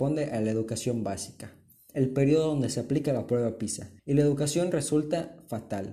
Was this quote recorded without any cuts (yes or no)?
no